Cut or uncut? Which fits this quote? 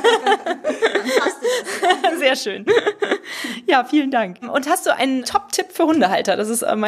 uncut